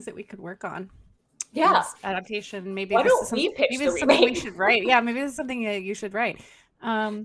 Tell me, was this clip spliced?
no; 0 cuts

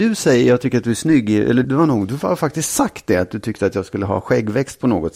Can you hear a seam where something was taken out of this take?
yes; 1 cut; at 1.6 s

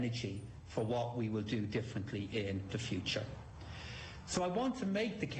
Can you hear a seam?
no; 0 cuts

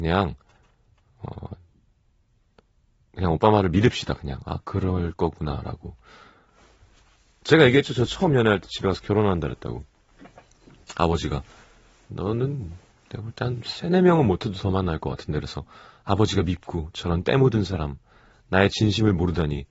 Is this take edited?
no; 0 cuts

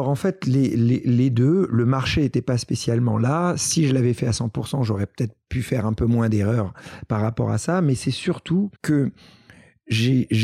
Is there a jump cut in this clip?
yes; 1 cut; at 8.8 s

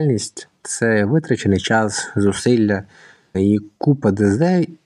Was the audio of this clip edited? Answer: yes; 1 cut; at 3.3 s

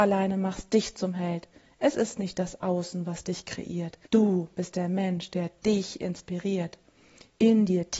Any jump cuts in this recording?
yes; 1 cut; at 4.1 s

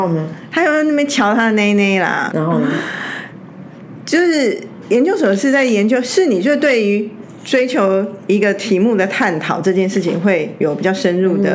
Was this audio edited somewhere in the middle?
yes; 1 cut; at 2.3 s

